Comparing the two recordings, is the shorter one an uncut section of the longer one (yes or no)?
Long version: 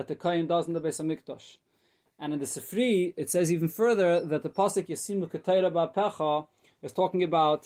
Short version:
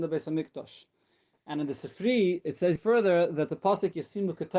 no